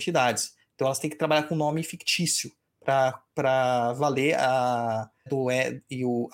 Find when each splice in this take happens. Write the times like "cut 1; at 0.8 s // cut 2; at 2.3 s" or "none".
cut 1; at 5.3 s